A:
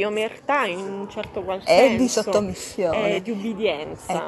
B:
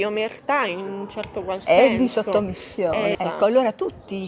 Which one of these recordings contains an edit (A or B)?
B